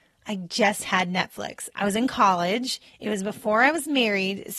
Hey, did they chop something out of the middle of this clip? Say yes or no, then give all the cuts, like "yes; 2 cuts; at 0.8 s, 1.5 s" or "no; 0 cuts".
yes; 1 cut; at 1.7 s